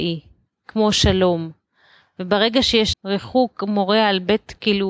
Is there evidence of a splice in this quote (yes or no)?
yes